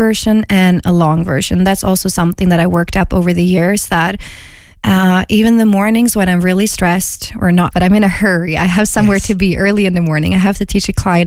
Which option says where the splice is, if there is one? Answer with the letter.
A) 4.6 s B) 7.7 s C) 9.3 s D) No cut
B